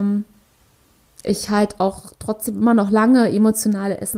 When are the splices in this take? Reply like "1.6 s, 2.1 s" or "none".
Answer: none